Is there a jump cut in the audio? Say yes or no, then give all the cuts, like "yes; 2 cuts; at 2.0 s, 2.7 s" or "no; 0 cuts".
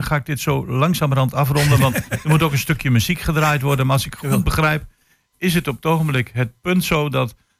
no; 0 cuts